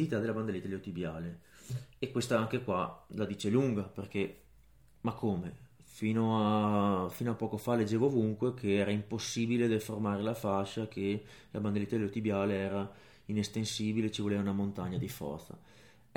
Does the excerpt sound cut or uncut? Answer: uncut